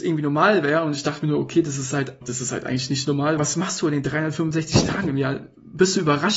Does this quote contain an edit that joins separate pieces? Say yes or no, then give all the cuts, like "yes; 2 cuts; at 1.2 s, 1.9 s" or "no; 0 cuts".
yes; 2 cuts; at 2.2 s, 3.4 s